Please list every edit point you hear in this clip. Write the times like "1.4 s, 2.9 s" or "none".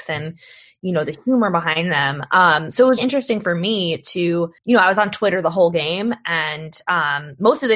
3.0 s, 4.6 s